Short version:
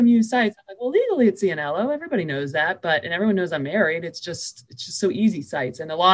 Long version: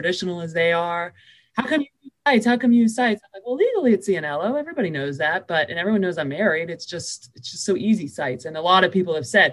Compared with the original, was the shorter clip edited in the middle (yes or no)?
no